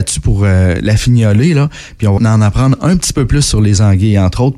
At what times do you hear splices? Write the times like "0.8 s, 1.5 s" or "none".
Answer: 2.2 s